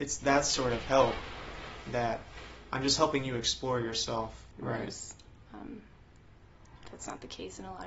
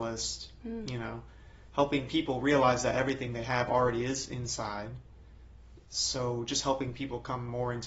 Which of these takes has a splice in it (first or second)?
first